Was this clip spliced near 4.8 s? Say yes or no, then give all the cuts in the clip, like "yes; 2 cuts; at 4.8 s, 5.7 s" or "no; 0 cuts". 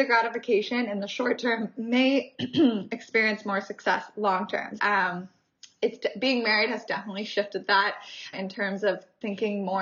yes; 2 cuts; at 4.8 s, 8.3 s